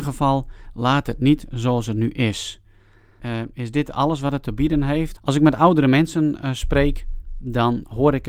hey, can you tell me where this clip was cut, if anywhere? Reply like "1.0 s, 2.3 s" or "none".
3.2 s, 5.2 s